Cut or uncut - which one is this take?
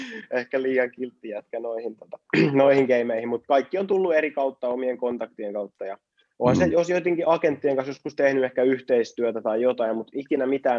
uncut